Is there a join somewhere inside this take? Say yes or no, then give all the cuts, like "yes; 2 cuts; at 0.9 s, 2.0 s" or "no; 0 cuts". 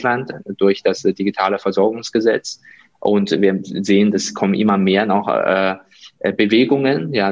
no; 0 cuts